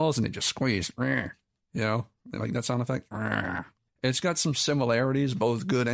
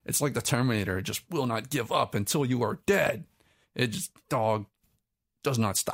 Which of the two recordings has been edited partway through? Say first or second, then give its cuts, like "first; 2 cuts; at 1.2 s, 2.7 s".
first; 1 cut; at 3.9 s